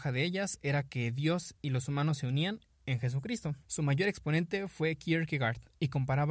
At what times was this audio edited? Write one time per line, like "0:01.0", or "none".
0:03.6